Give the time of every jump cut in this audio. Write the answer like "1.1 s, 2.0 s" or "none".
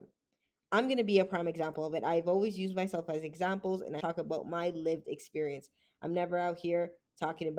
4.0 s